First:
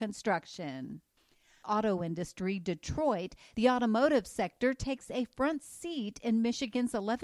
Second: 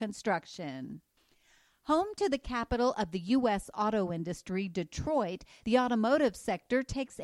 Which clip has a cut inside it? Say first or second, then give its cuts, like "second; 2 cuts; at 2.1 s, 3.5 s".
first; 1 cut; at 1.6 s